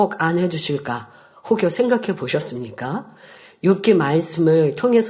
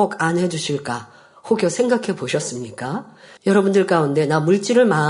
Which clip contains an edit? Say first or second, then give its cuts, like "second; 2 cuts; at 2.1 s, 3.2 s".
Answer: second; 1 cut; at 3.4 s